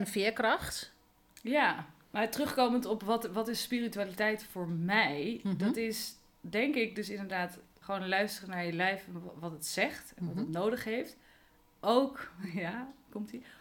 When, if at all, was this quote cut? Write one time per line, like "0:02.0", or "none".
0:07.8